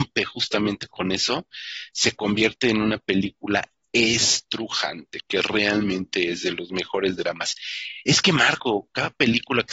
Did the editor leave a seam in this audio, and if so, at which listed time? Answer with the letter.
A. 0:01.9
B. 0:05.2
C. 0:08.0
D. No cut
B